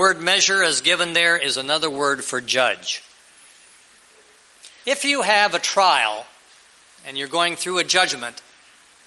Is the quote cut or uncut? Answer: cut